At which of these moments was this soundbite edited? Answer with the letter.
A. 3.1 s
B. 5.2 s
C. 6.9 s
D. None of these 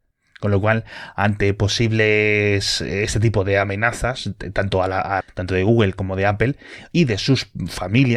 B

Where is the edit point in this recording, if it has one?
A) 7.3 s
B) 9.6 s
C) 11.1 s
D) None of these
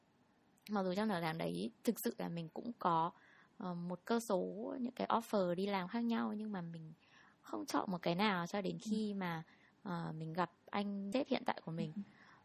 C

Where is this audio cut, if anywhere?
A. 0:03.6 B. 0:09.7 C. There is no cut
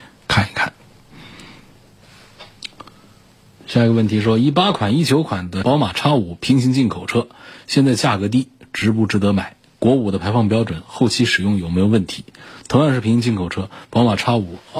C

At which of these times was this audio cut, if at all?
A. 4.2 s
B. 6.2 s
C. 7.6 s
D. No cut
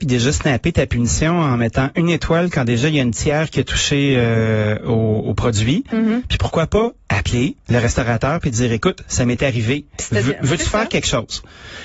C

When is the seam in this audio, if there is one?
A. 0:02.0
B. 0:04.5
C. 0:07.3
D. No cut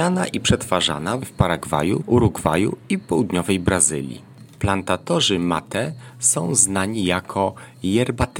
A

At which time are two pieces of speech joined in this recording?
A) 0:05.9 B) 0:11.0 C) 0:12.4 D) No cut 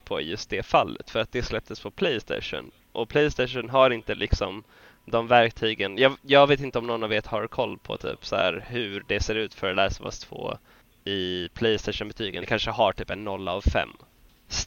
D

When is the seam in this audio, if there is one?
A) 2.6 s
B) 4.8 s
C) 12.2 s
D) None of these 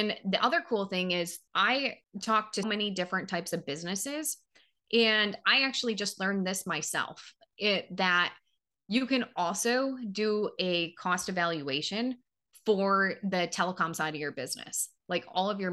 A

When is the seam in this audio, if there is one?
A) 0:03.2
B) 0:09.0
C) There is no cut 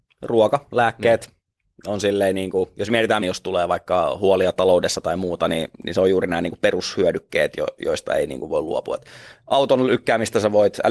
A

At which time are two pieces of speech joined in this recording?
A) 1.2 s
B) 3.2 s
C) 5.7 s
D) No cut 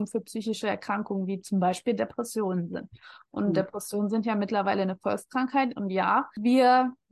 D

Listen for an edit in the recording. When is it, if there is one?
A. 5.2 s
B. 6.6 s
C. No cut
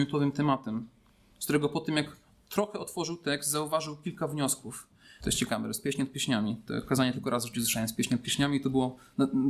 A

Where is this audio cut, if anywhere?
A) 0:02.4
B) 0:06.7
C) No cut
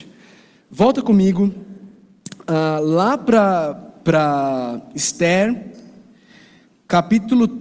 C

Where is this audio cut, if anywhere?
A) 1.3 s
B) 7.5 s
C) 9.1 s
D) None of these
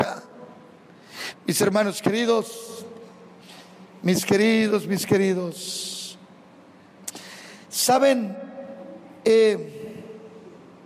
A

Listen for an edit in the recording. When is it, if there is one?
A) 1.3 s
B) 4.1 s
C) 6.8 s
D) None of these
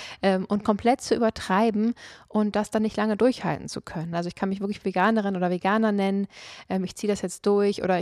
B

